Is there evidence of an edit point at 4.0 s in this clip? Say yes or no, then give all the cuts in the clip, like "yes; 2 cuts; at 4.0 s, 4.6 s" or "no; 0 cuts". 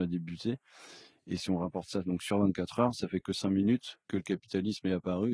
yes; 1 cut; at 4.0 s